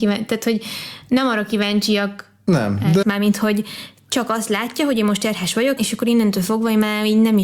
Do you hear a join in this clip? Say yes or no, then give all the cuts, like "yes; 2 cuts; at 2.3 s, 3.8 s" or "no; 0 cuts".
yes; 2 cuts; at 3.0 s, 5.8 s